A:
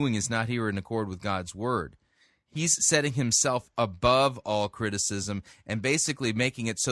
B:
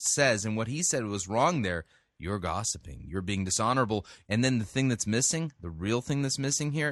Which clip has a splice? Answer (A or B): B